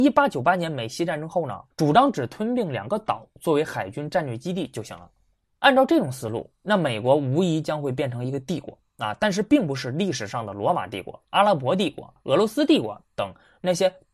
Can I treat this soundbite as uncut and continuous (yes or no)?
no